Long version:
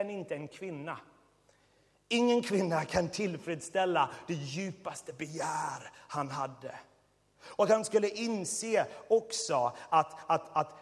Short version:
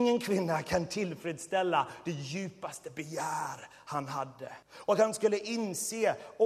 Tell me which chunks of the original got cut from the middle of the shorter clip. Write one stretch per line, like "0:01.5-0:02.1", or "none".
0:06.9-0:07.3